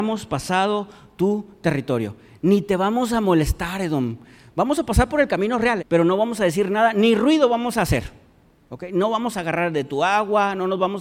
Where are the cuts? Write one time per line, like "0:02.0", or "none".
0:05.8

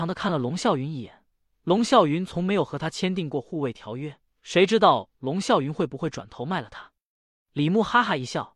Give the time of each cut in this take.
0:01.5
0:04.3

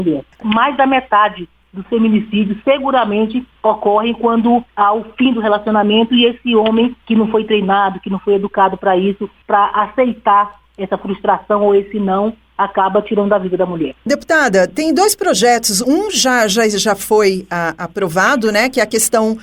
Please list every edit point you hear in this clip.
none

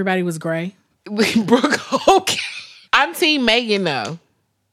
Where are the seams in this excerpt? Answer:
0:00.9
0:02.9

